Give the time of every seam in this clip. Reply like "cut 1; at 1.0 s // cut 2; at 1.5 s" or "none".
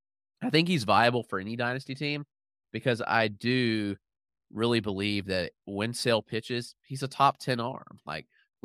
none